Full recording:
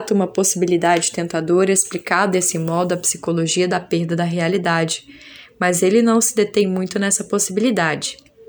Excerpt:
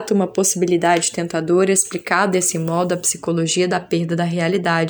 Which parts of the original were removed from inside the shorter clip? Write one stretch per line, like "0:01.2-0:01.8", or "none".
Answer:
none